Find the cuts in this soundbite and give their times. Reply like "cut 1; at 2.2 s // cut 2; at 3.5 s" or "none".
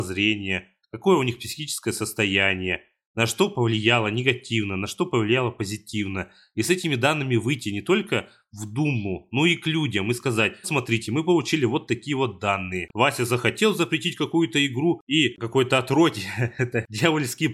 cut 1; at 10.6 s // cut 2; at 12.9 s // cut 3; at 15.0 s